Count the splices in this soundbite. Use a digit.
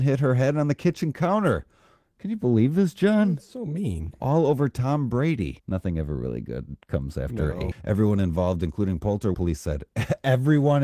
3